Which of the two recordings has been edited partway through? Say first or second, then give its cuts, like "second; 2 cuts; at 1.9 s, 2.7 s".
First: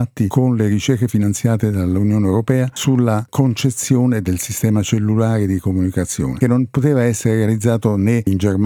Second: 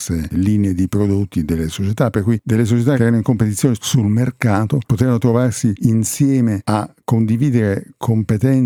first; 1 cut; at 6.4 s